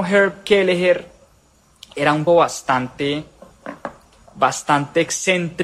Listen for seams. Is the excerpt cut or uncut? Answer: cut